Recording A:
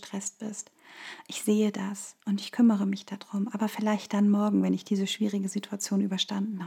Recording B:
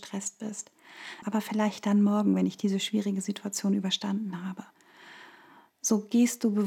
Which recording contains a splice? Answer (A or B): B